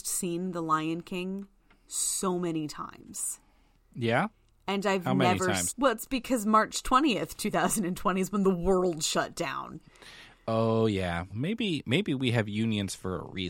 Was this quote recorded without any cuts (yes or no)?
no